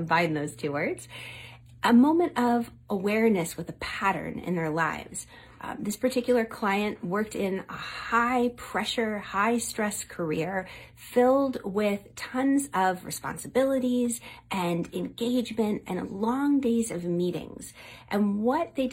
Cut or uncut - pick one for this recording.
cut